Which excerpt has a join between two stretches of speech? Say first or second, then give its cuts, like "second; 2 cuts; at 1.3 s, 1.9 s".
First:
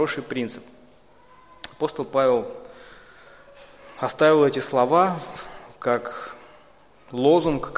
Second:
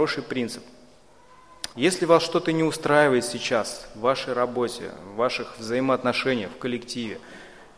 second; 1 cut; at 1.7 s